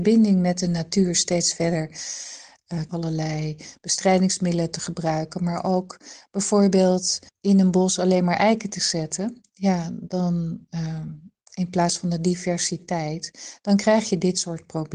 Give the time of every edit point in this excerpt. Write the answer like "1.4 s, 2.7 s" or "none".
2.9 s, 7.3 s